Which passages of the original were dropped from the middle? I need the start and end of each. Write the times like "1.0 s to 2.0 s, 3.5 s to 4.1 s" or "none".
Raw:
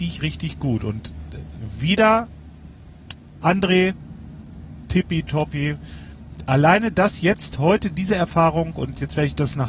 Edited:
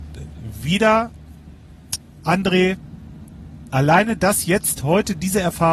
4.9 s to 6.5 s